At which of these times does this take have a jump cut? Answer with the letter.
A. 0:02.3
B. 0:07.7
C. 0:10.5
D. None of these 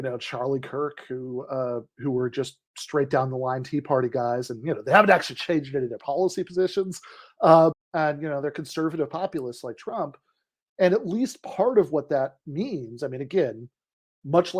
B